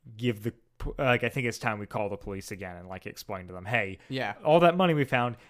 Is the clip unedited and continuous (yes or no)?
yes